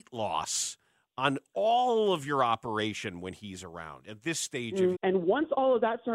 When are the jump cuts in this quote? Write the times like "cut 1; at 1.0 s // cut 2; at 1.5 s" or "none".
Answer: cut 1; at 4.9 s